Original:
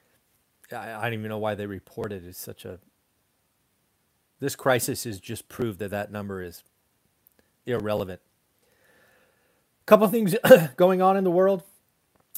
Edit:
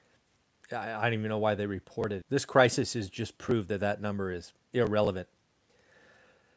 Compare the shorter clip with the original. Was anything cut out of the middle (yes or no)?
yes